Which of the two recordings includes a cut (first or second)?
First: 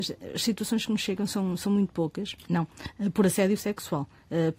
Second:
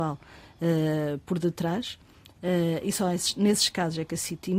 first